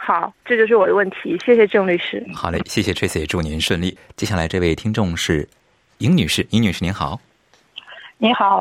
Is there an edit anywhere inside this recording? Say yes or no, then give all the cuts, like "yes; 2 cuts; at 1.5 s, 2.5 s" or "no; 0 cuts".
no; 0 cuts